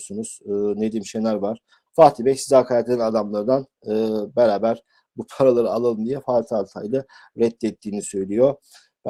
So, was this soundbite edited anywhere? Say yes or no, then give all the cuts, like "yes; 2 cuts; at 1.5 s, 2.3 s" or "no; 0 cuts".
yes; 1 cut; at 1.9 s